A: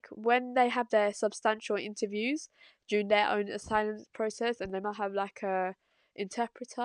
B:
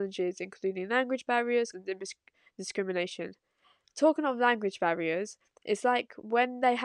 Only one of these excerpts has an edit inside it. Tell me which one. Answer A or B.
B